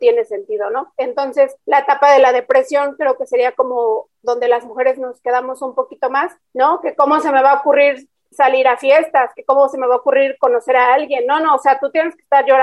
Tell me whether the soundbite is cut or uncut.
cut